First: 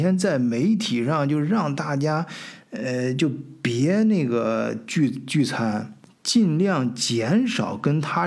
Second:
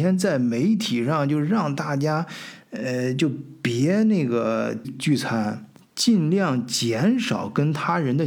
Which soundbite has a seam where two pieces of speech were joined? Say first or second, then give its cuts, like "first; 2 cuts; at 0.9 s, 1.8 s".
second; 1 cut; at 4.8 s